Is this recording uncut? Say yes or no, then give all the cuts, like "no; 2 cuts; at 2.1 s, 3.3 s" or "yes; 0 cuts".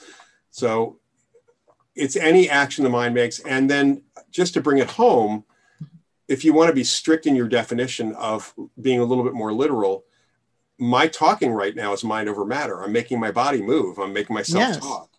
yes; 0 cuts